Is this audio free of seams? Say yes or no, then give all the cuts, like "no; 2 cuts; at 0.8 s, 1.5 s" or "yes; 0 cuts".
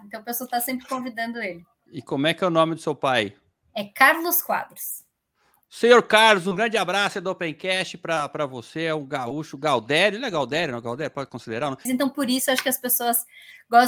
no; 1 cut; at 11.9 s